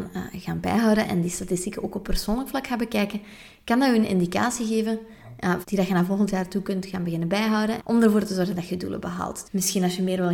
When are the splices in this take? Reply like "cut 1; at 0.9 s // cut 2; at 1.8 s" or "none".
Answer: cut 1; at 5.6 s // cut 2; at 7.8 s // cut 3; at 9.4 s